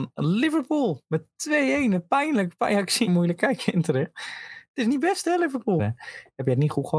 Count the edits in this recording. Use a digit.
2